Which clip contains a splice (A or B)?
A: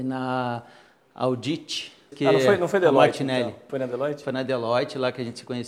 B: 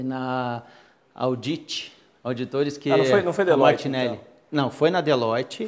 A